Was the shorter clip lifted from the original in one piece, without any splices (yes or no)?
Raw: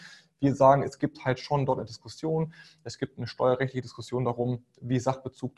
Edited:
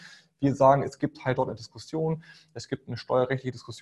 no